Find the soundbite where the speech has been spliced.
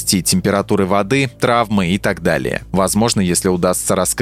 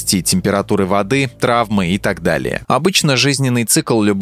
second; 1 cut; at 2.6 s

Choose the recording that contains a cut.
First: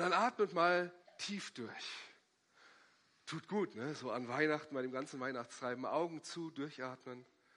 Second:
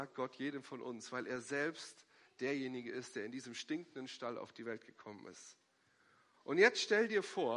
second; 1 cut; at 6.3 s

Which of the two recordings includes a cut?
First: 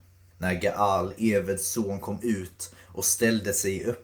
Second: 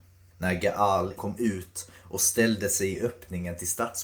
second; 1 cut; at 1.2 s

